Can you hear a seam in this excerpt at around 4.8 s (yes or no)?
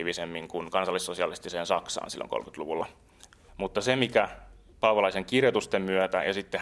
no